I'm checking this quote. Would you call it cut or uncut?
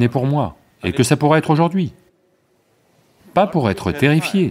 uncut